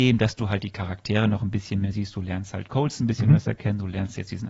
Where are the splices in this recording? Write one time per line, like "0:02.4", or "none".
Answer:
none